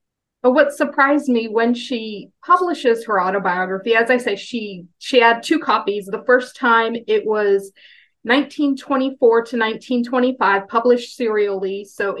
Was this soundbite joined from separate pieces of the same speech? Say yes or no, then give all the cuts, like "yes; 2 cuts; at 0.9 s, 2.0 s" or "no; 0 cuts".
no; 0 cuts